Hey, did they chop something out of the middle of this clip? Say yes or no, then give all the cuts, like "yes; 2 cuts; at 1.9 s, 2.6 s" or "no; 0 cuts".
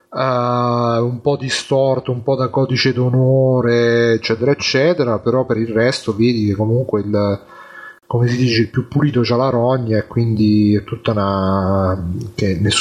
no; 0 cuts